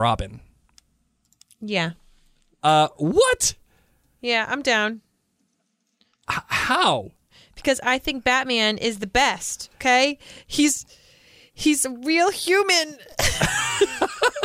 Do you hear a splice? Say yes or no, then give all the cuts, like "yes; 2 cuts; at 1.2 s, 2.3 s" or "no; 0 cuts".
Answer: no; 0 cuts